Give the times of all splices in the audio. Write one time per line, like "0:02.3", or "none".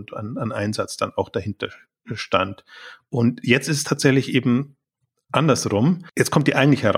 none